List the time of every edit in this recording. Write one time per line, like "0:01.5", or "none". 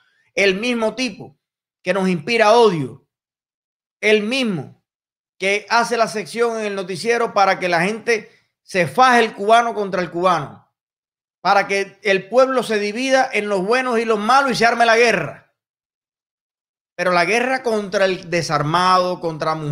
none